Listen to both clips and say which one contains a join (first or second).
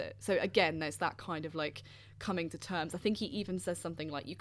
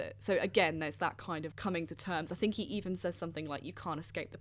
second